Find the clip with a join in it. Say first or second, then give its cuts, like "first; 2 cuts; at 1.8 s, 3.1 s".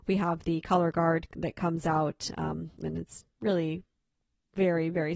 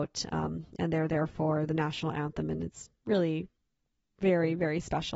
first; 1 cut; at 2.8 s